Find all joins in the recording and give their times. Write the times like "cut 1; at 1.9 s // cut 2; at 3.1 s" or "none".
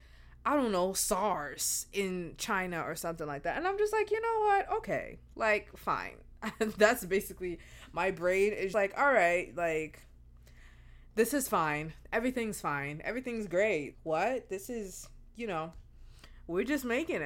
cut 1; at 8.7 s // cut 2; at 13.9 s